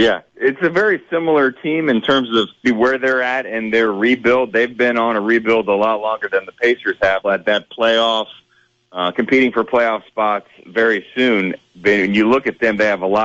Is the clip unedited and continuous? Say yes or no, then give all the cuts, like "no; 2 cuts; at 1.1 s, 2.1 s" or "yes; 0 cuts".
no; 2 cuts; at 2.6 s, 7.2 s